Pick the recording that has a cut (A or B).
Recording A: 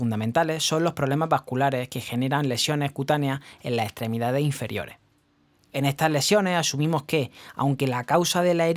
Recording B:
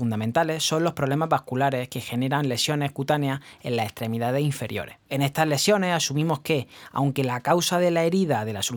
B